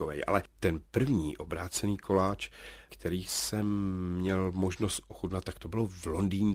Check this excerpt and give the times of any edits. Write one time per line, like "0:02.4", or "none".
none